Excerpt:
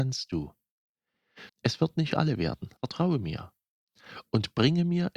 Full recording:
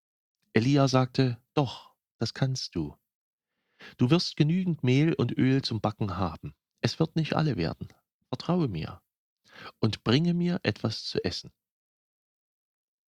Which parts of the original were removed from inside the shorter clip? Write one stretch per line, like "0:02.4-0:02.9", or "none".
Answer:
0:03.9-0:06.7
0:08.0-0:08.3